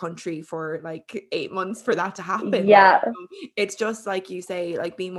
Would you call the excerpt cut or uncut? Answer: uncut